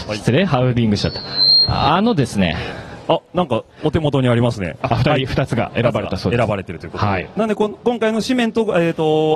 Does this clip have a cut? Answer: yes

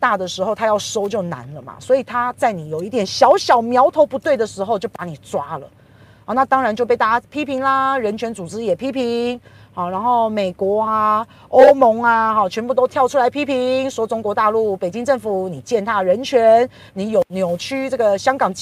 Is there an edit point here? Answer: no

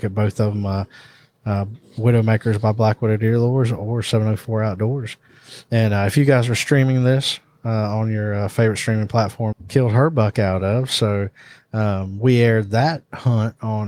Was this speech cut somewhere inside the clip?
yes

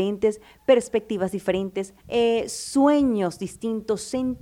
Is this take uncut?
no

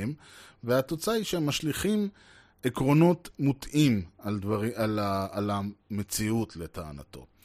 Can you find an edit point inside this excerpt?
no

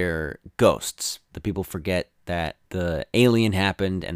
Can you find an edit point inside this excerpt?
yes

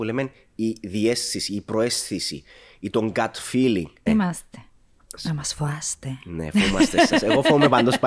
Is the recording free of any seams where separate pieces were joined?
no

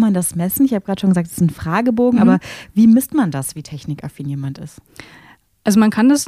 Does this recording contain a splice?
no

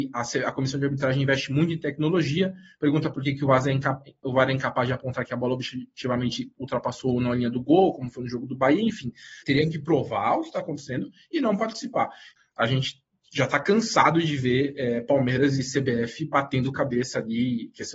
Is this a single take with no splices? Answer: no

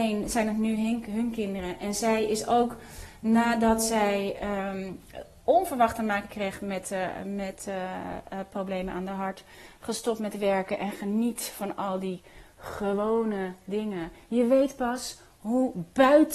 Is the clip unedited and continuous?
yes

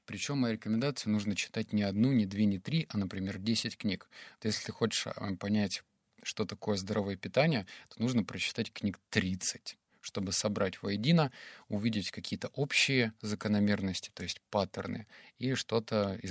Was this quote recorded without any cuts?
yes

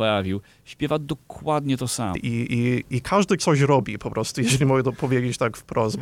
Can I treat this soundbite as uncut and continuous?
no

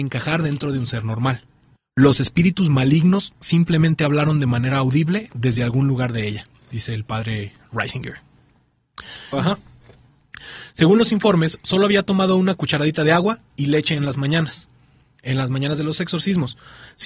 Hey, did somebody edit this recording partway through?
yes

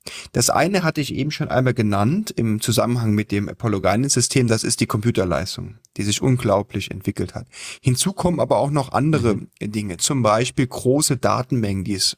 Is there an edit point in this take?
no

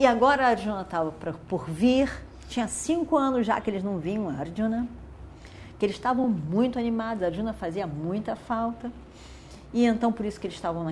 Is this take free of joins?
yes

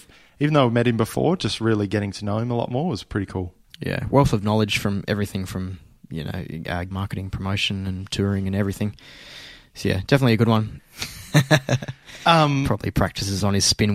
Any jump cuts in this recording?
yes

